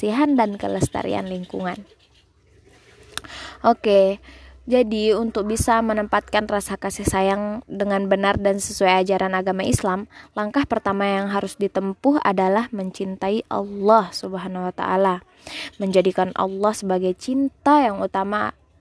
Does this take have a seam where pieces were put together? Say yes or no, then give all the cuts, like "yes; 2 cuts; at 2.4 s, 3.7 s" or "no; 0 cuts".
no; 0 cuts